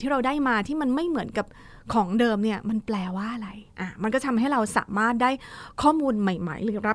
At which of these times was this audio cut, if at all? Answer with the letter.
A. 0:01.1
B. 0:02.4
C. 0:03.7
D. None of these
C